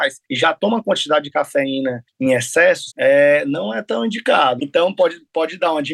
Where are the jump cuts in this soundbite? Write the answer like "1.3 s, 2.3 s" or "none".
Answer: 2.9 s, 4.6 s